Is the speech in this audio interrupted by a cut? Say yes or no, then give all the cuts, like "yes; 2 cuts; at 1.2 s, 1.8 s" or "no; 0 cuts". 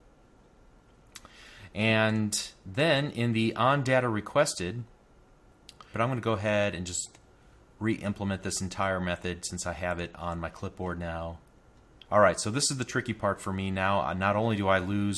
yes; 2 cuts; at 5.9 s, 12.0 s